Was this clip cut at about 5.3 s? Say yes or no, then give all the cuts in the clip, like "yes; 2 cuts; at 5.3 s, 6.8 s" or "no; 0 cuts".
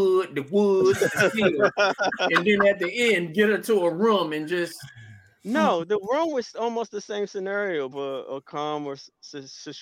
no; 1 cut; at 7.9 s